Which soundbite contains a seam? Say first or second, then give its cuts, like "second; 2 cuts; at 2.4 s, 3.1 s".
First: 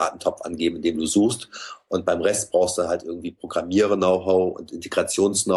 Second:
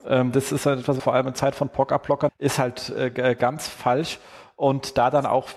second; 2 cuts; at 1.0 s, 2.3 s